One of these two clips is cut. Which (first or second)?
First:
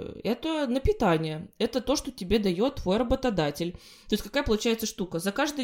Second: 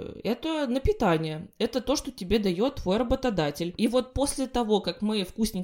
second